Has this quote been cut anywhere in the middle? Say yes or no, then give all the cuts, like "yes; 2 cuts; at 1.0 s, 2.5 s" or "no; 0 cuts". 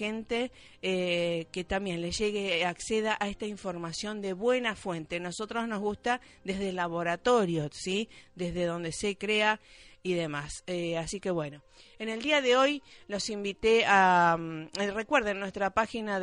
no; 0 cuts